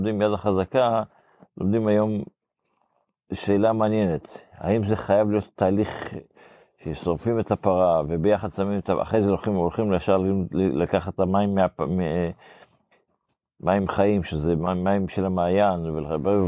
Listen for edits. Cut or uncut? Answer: uncut